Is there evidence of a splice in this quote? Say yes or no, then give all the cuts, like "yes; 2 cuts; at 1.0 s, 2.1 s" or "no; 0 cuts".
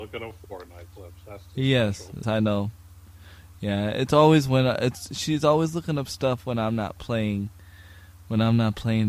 yes; 1 cut; at 2.2 s